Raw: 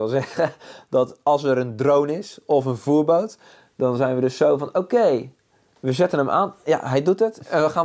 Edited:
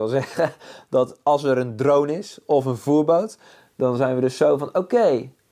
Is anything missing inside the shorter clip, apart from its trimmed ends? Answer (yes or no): no